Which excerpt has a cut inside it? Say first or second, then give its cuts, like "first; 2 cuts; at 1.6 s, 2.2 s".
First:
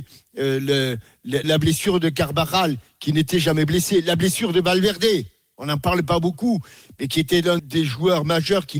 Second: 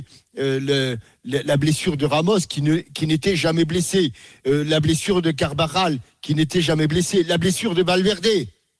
first; 2 cuts; at 1.4 s, 7.6 s